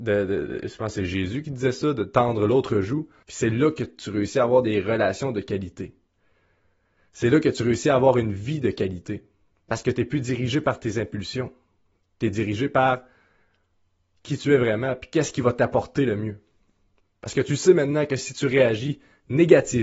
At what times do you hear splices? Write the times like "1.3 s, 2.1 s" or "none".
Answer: 3.2 s